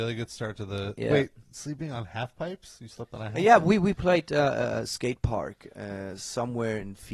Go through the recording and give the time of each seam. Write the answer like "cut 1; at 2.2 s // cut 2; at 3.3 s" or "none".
none